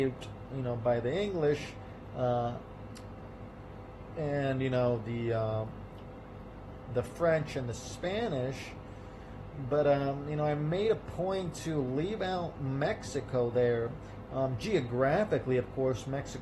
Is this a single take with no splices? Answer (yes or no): yes